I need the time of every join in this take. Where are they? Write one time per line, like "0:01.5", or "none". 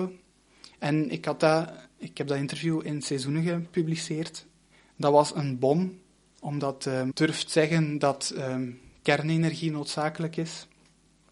0:07.1